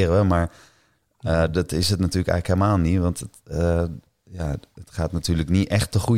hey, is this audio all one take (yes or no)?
yes